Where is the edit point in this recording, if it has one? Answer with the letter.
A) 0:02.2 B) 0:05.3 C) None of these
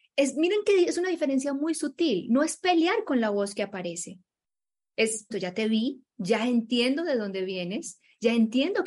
B